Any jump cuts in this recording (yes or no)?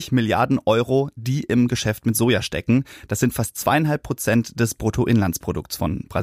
no